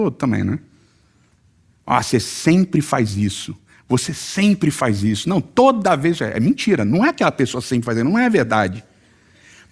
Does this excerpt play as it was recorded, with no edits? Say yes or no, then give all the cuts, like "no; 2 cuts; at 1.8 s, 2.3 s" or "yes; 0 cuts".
yes; 0 cuts